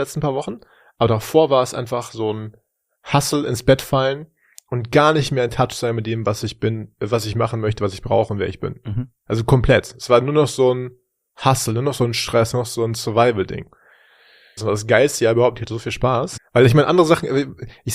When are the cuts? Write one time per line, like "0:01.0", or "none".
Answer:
0:14.6
0:16.4